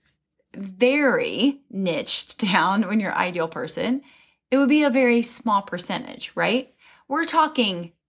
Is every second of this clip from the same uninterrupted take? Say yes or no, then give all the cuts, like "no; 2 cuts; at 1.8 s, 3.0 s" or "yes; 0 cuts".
yes; 0 cuts